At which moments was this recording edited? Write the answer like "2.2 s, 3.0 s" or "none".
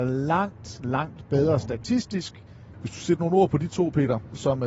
2.7 s